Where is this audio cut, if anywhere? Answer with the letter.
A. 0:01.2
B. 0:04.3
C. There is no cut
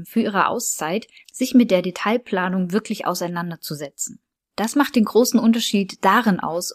A